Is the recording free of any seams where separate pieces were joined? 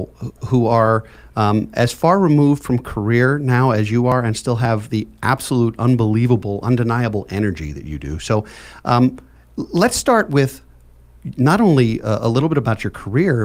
yes; 0 cuts

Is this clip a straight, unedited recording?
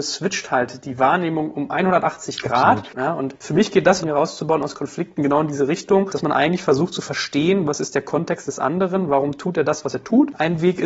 no; 2 cuts; at 2.9 s, 4.0 s

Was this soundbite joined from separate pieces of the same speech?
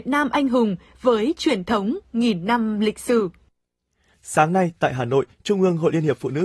yes; 1 cut; at 4.1 s

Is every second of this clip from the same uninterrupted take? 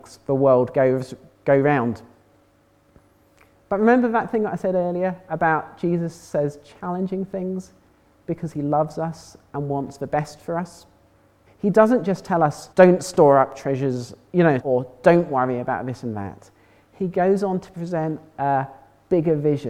no; 3 cuts; at 11.5 s, 12.7 s, 14.6 s

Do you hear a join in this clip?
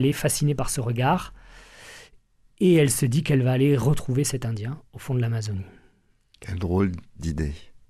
no; 0 cuts

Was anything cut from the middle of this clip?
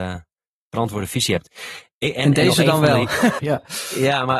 yes; 1 cut; at 3.4 s

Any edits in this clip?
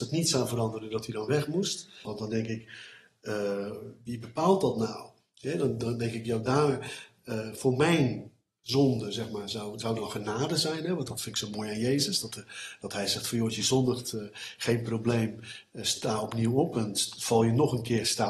yes; 1 cut; at 2.1 s

